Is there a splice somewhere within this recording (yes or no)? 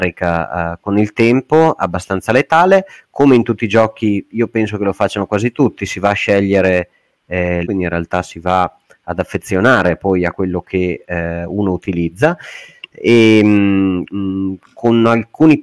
yes